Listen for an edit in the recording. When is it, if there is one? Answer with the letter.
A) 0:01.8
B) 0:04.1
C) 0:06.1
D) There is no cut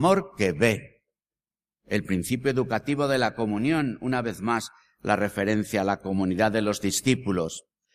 A